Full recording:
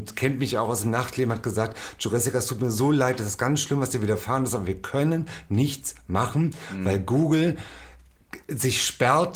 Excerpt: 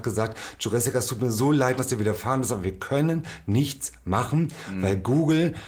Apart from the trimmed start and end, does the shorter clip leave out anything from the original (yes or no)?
yes